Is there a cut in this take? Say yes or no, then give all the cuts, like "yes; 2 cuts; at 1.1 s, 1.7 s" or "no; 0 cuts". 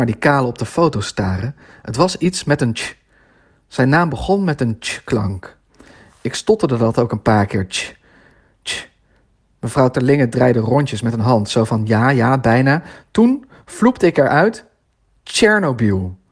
no; 0 cuts